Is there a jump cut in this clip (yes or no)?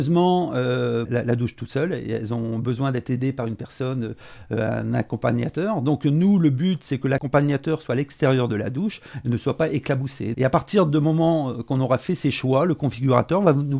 yes